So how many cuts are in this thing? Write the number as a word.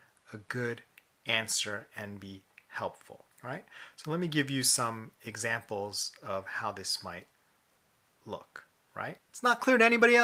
two